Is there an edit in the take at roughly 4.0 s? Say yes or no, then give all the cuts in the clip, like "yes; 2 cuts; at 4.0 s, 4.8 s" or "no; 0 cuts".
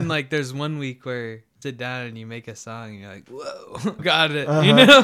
yes; 2 cuts; at 1.6 s, 4.0 s